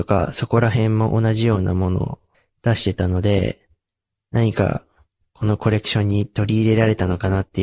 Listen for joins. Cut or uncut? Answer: cut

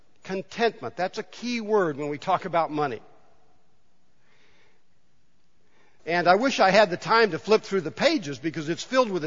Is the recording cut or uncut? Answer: cut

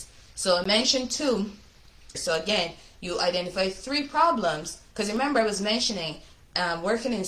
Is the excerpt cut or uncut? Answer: cut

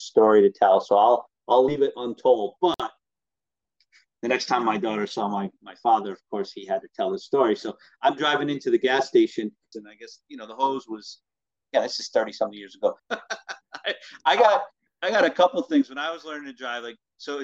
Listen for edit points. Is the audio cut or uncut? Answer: cut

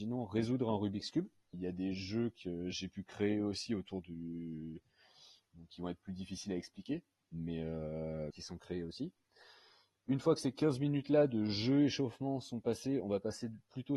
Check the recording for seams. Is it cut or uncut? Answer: cut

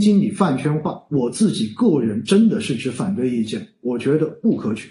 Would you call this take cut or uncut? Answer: uncut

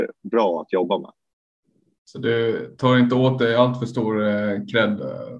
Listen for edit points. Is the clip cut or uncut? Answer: uncut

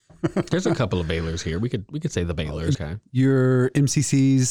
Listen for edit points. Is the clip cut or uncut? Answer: cut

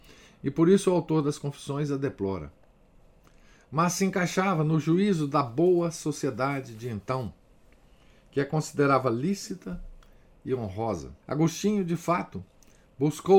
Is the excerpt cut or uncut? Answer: cut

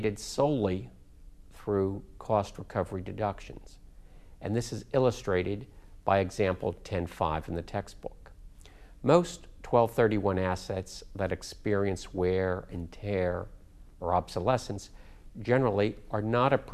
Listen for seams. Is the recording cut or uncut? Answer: uncut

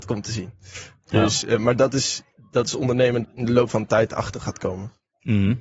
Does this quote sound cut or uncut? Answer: cut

